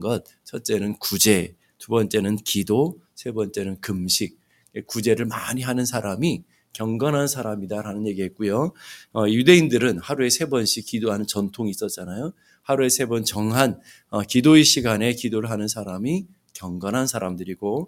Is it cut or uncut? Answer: uncut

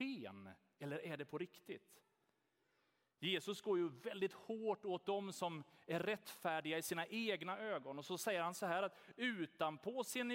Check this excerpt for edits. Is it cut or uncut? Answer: uncut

